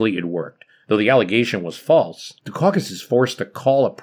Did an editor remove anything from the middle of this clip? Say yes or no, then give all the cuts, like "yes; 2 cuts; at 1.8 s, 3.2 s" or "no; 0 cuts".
yes; 1 cut; at 2.4 s